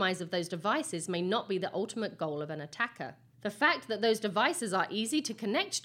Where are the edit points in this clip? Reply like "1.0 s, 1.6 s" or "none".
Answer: none